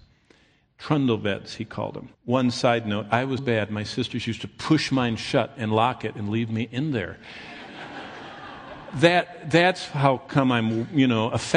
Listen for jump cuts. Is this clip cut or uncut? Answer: cut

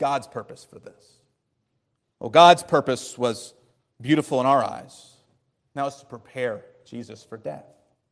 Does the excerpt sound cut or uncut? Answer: uncut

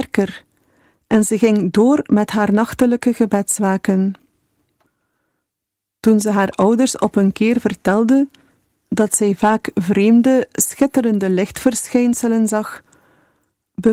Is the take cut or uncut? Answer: uncut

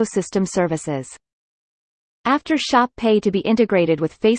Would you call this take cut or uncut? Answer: cut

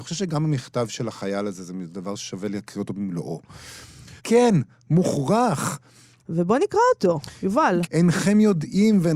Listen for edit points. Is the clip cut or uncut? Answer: cut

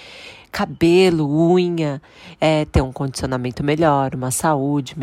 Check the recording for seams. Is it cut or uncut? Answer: cut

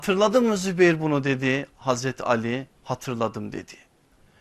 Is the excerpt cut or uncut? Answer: cut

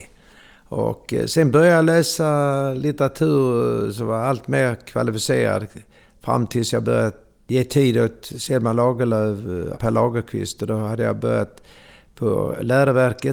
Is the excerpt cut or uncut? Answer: cut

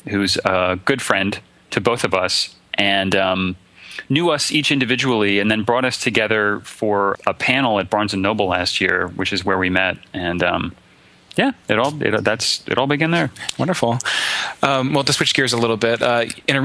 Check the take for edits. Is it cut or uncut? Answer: cut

